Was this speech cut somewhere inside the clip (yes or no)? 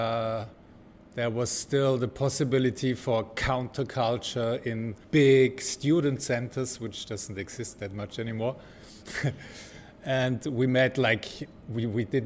yes